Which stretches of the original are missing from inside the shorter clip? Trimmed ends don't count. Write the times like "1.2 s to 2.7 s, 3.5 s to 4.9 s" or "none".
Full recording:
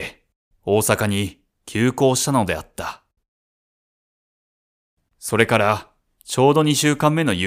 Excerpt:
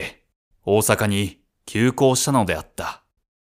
none

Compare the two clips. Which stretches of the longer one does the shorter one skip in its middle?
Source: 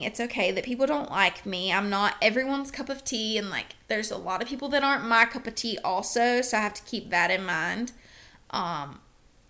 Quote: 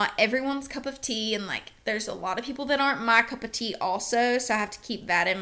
none

